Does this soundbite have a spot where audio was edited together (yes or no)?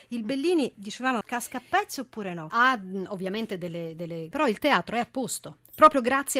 yes